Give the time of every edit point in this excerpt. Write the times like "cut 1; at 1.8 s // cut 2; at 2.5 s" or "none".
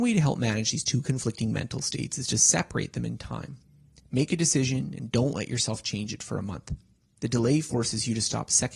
none